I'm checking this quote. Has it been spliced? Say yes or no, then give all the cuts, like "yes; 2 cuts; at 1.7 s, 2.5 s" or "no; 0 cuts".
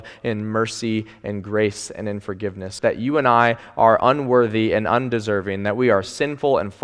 yes; 1 cut; at 2.8 s